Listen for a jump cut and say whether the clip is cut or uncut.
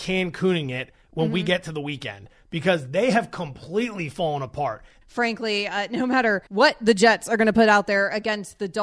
cut